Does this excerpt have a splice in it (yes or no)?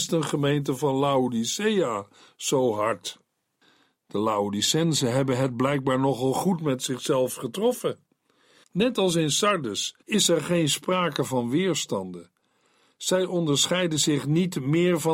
yes